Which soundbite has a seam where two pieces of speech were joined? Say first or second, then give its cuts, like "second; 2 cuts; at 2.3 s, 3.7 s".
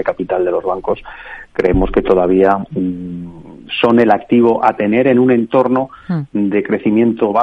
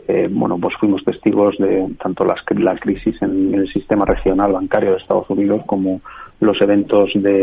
second; 1 cut; at 2.0 s